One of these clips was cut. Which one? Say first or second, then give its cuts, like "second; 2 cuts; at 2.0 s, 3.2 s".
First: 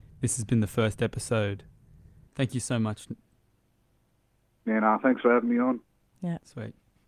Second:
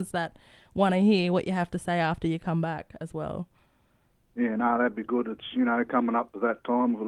first; 1 cut; at 2.3 s